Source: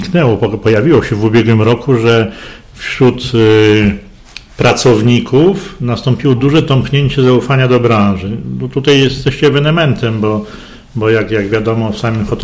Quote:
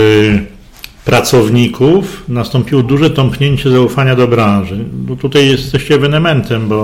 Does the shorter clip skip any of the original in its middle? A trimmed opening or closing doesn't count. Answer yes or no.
no